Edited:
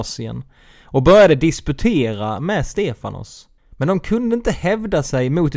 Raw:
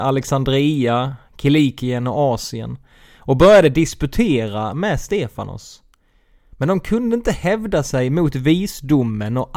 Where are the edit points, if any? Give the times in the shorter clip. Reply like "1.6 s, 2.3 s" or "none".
3.6 s